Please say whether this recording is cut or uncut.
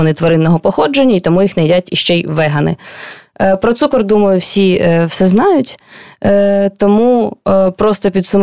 uncut